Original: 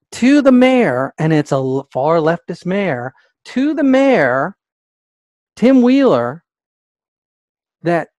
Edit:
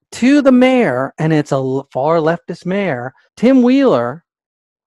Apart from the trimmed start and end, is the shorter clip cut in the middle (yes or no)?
yes